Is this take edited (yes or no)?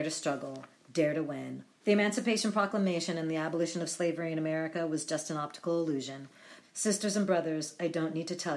yes